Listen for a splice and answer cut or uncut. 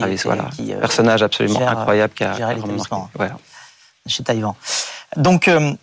uncut